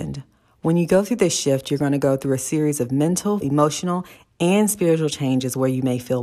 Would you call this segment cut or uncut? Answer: cut